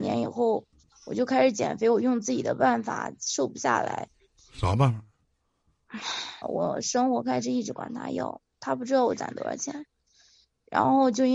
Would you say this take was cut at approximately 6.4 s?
yes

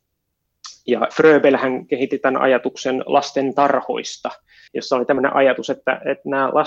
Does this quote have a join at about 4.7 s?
yes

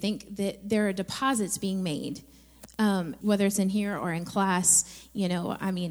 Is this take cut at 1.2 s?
no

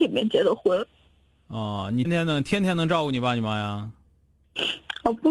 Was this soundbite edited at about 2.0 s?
yes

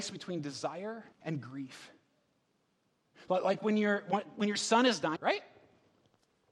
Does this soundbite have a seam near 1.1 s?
yes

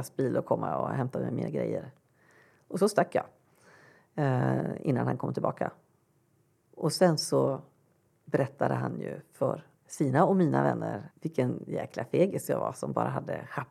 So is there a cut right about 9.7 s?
yes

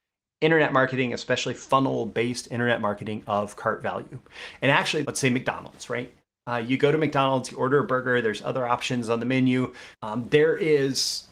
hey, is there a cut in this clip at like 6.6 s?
no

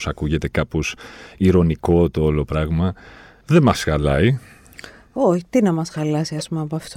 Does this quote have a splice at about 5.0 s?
no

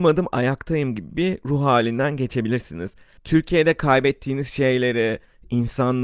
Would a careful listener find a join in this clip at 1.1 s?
no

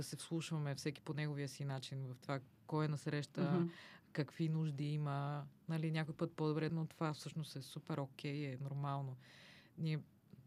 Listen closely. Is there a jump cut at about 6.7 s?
yes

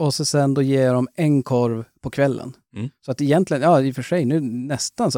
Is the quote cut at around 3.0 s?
no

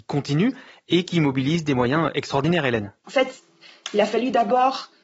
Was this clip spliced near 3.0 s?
yes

